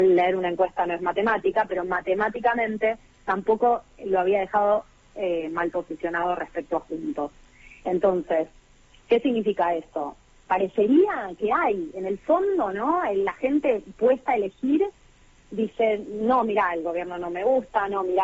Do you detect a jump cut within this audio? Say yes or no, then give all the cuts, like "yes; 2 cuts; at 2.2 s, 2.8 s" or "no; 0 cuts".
no; 0 cuts